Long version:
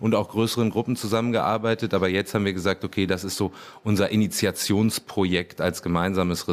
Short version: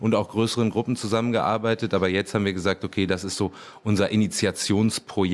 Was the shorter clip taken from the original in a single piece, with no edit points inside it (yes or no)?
yes